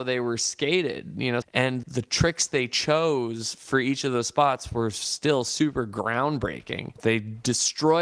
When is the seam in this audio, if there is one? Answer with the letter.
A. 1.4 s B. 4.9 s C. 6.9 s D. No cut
A